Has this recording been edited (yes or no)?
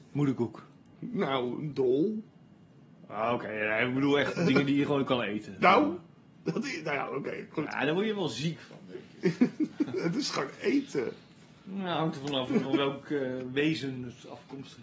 yes